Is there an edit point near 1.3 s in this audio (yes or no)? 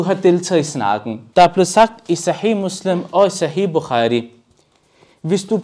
yes